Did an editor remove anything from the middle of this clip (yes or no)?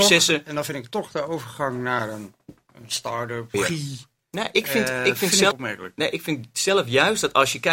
yes